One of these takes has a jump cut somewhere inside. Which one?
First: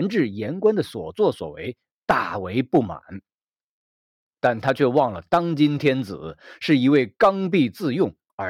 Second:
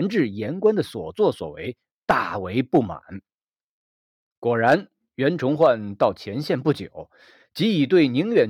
first; 1 cut; at 4.3 s

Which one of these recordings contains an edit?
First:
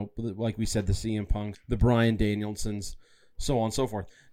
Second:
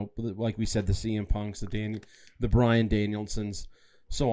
first; 1 cut; at 1.5 s

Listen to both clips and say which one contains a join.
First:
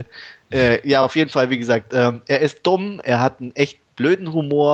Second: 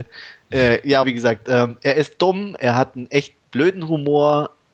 second; 1 cut; at 1.0 s

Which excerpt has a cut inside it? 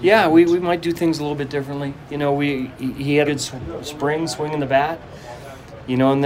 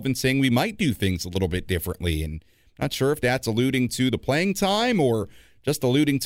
first; 1 cut; at 3.3 s

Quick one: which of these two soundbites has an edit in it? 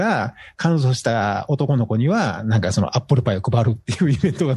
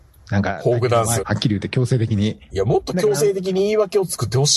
second; 2 cuts; at 1.2 s, 2.5 s

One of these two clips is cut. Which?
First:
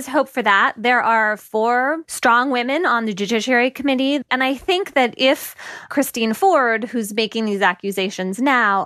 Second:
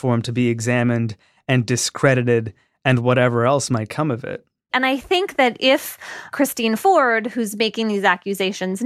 second; 1 cut; at 4.7 s

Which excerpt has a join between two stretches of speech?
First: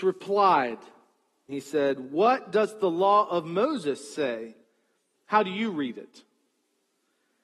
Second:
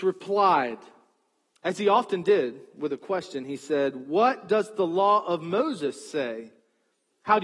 first; 1 cut; at 1.5 s

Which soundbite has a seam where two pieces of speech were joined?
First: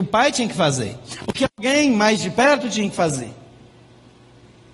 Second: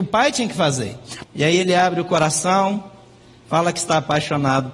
second; 1 cut; at 1.2 s

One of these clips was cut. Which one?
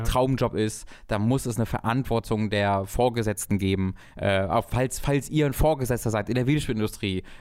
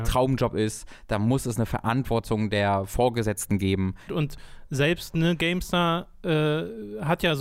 second; 1 cut; at 4.1 s

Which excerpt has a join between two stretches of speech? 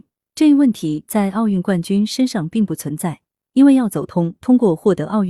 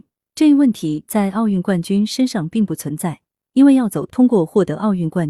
second; 1 cut; at 4.1 s

